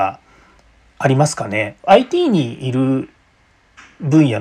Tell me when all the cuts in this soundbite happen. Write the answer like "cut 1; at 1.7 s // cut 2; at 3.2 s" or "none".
cut 1; at 1.8 s